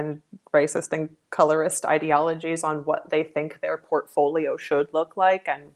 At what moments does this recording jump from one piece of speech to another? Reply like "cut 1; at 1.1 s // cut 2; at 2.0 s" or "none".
none